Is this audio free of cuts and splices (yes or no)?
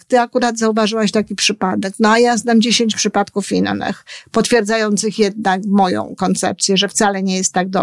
yes